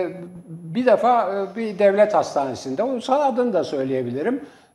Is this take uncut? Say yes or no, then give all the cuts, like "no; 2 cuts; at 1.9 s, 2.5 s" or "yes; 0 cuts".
yes; 0 cuts